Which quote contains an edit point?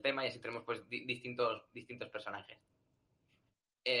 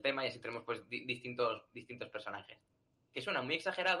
second; 1 cut; at 3.0 s

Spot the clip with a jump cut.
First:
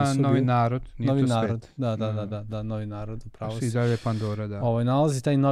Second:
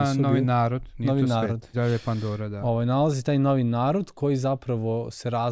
second; 1 cut; at 1.7 s

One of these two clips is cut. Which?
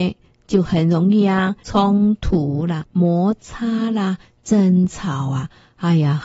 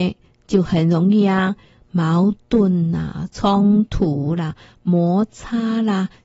first; 2 cuts; at 1.6 s, 2.8 s

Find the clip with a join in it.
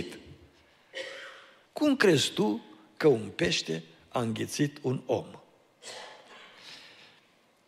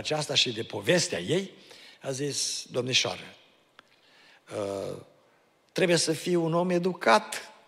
first; 1 cut; at 1.7 s

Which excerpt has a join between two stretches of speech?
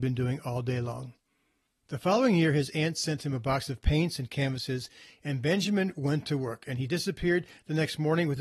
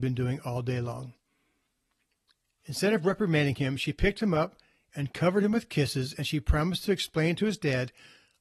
first; 1 cut; at 1.8 s

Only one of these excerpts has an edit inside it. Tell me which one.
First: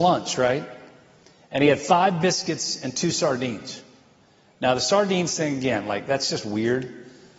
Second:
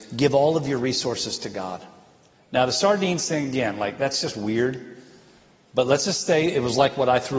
second; 1 cut; at 2.3 s

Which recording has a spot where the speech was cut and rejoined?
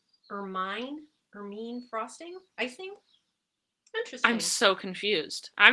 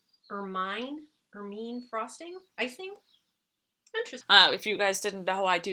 second; 1 cut; at 4.2 s

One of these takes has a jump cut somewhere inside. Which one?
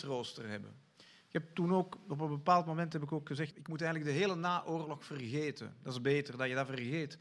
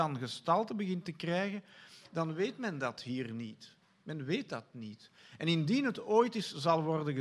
first; 1 cut; at 3.5 s

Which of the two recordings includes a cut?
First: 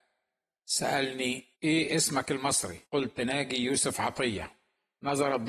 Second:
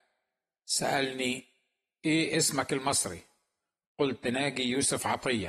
first; 2 cuts; at 1.5 s, 2.8 s

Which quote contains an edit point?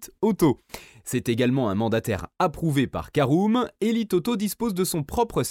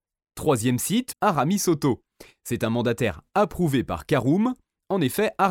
second; 1 cut; at 1.1 s

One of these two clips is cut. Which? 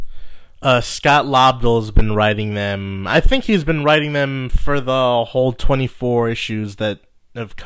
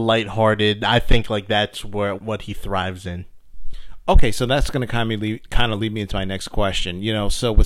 second; 1 cut; at 2.2 s

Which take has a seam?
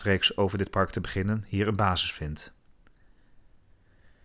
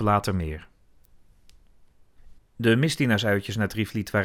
second; 1 cut; at 2.4 s

